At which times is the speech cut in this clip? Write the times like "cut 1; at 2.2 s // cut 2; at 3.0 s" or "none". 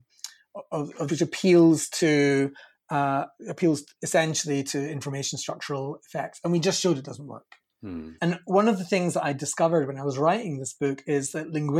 cut 1; at 1.1 s // cut 2; at 8.2 s